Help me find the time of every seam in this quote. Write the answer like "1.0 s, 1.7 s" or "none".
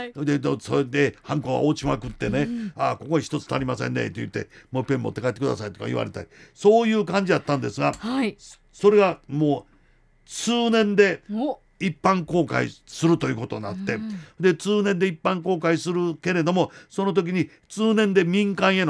2.7 s